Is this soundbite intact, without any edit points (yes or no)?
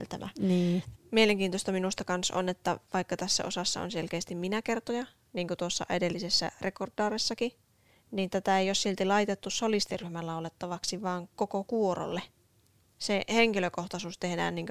no